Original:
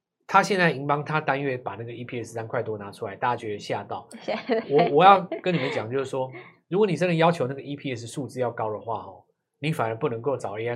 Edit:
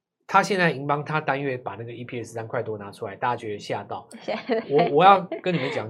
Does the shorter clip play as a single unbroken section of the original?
yes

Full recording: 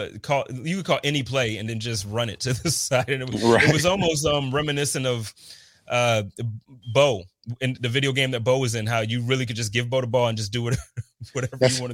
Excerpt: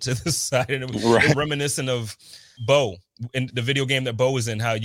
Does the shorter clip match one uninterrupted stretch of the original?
no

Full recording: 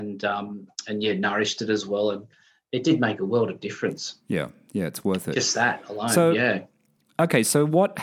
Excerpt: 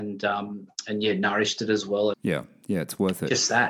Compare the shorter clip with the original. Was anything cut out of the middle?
yes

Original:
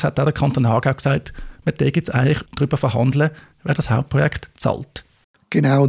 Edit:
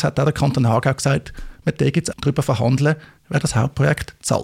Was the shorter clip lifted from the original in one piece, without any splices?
no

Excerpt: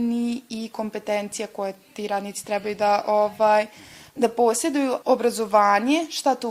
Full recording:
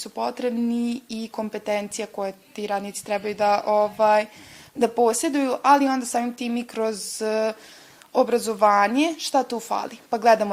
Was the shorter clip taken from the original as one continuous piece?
no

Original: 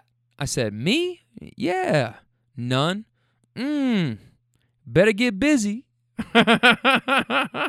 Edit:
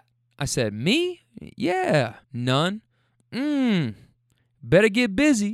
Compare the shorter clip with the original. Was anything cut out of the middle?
yes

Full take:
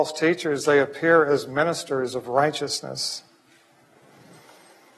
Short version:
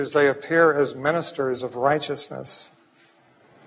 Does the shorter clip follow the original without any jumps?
yes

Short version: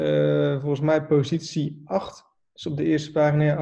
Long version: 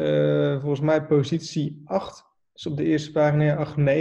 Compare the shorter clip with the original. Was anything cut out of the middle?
no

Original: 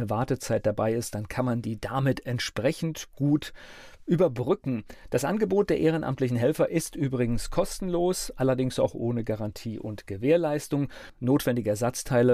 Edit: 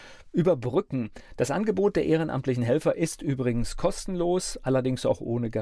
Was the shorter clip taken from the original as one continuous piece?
yes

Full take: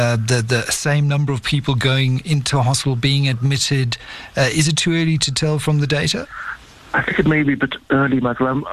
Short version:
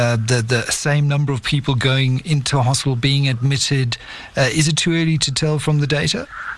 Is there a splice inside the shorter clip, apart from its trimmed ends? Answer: no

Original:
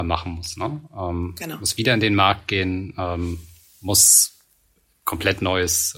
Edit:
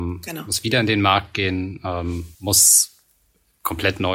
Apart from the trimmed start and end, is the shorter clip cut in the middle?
yes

